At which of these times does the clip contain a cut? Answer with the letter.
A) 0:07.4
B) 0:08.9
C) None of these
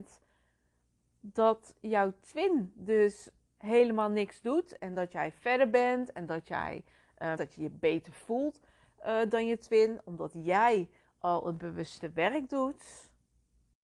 A